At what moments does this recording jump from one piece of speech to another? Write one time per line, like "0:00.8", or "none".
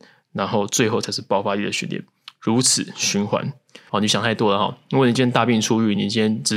0:03.9